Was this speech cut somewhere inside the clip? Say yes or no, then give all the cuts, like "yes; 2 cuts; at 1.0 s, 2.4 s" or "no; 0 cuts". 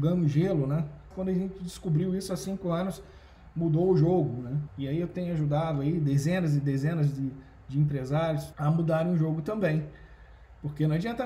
yes; 3 cuts; at 1.1 s, 4.7 s, 8.5 s